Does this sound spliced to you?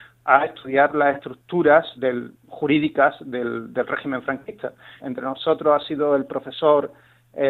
yes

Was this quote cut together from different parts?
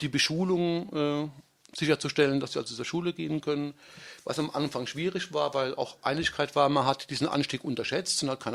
no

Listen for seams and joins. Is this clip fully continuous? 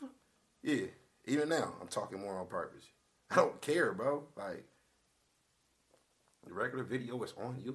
yes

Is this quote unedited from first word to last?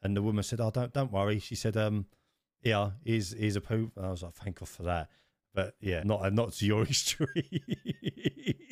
no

